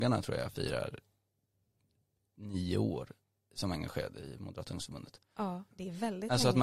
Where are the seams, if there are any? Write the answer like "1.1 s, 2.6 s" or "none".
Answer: 5.7 s